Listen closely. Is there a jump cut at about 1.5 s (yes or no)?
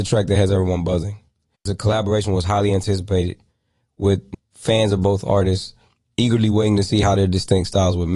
yes